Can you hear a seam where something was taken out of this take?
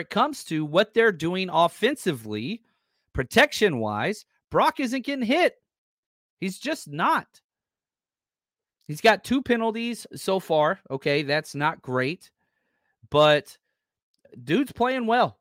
no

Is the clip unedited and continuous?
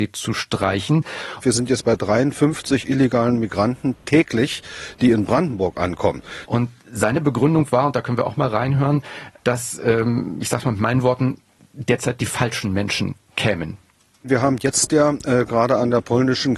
no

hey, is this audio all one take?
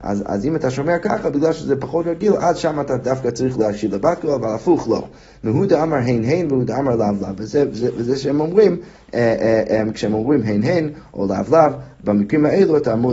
yes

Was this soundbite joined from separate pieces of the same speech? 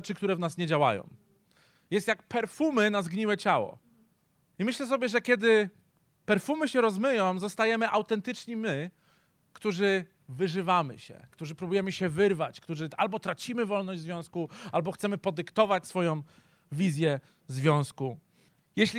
yes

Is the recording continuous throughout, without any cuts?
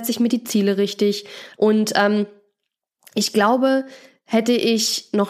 no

